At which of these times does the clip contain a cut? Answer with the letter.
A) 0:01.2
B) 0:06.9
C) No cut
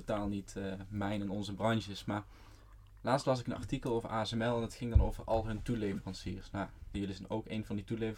B